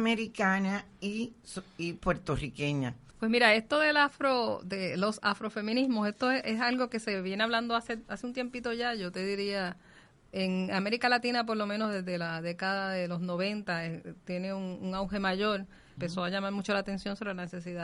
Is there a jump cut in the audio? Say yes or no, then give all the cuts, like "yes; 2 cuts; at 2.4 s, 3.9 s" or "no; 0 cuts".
yes; 2 cuts; at 3.1 s, 16.0 s